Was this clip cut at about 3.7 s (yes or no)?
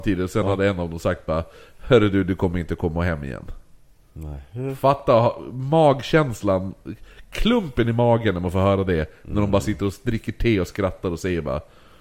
no